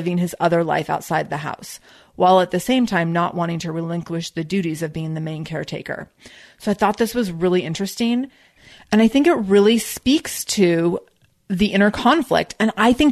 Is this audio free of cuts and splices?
yes; 0 cuts

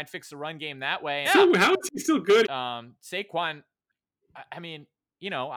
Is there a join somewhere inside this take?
yes; 2 cuts; at 1.2 s, 2.4 s

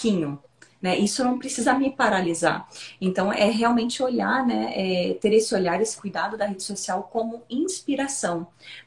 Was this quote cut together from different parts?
no; 0 cuts

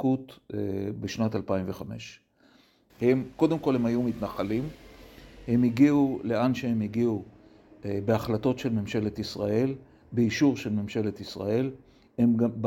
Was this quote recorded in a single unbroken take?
no; 1 cut; at 2.9 s

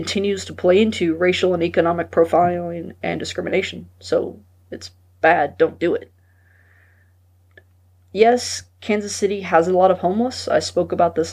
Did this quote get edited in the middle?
no; 0 cuts

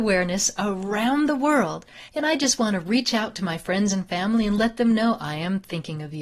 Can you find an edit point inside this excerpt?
no; 0 cuts

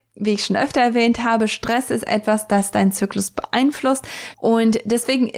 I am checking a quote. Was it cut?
yes; 1 cut; at 4.3 s

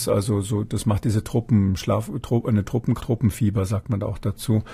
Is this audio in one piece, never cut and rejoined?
no; 1 cut; at 3.0 s

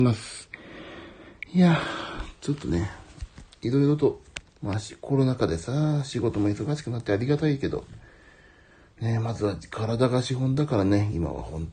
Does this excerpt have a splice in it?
yes; 1 cut; at 4.5 s

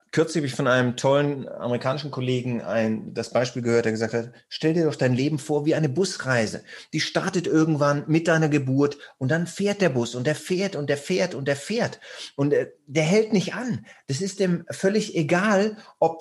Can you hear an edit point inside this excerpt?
no; 0 cuts

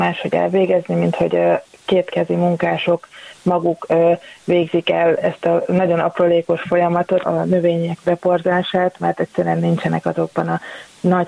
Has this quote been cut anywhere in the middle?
yes; 1 cut; at 7.2 s

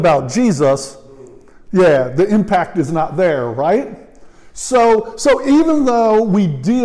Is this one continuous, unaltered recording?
yes; 0 cuts

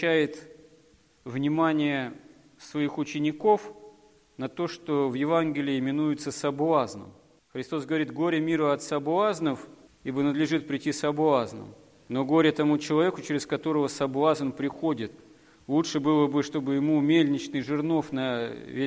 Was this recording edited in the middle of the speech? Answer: no; 0 cuts

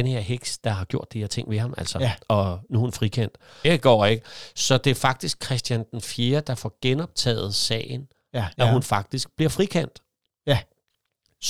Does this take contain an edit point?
yes; 2 cuts; at 3.6 s, 8.6 s

